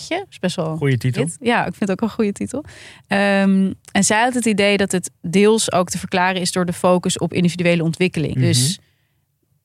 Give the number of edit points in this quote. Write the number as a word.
one